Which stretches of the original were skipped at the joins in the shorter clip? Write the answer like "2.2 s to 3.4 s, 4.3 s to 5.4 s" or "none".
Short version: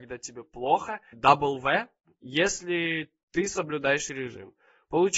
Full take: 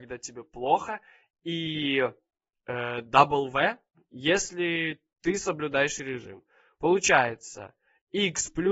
1.1 s to 3.0 s